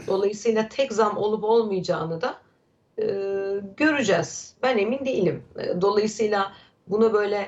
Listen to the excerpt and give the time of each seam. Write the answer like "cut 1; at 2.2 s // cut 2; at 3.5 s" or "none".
none